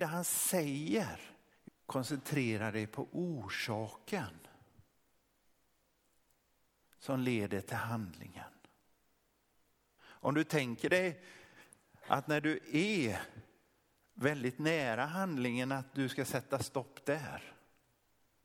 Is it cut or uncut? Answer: cut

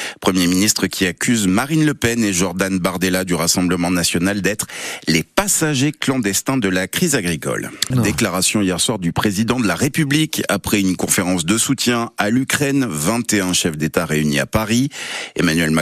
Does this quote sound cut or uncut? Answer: cut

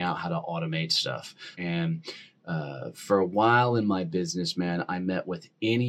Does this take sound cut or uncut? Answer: cut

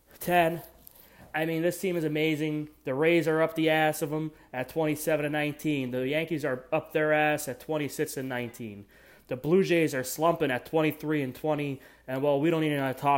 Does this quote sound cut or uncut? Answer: uncut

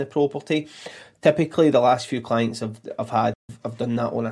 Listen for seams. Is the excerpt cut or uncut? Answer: uncut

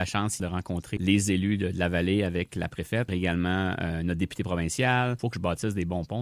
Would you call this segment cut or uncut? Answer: uncut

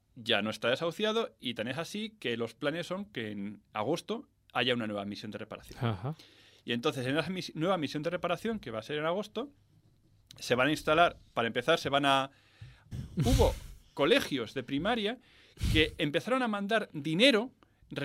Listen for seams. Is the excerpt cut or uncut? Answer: cut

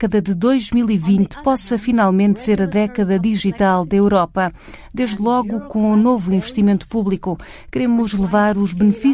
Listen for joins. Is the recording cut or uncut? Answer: uncut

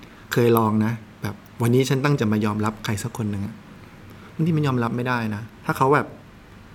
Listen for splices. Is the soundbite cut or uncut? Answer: cut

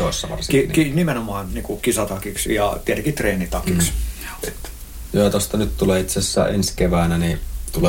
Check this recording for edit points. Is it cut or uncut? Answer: cut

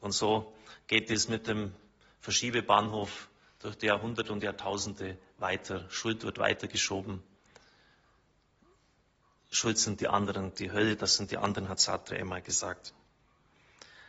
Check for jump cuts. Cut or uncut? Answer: uncut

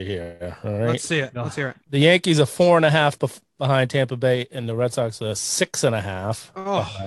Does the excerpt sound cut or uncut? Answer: cut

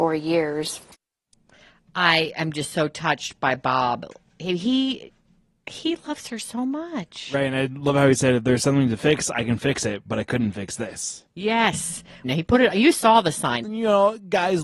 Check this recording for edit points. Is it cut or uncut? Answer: cut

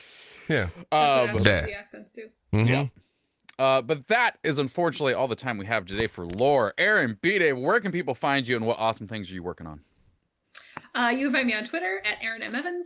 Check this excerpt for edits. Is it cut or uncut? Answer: cut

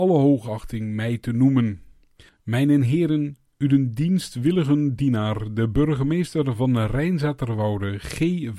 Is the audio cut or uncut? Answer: uncut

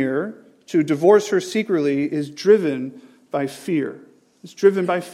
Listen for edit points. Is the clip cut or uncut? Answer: uncut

